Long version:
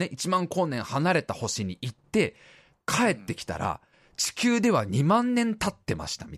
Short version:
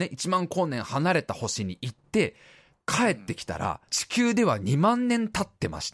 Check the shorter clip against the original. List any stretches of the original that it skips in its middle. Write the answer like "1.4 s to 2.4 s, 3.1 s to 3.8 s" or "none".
3.9 s to 4.1 s